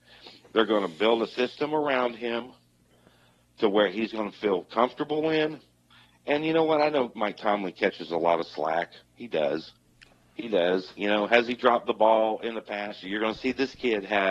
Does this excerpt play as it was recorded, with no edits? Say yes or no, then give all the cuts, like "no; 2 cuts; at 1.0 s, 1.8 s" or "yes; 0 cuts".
no; 1 cut; at 13.0 s